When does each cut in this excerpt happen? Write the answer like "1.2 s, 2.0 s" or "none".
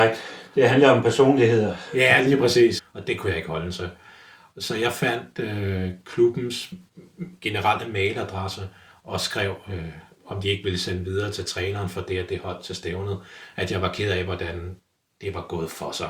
2.8 s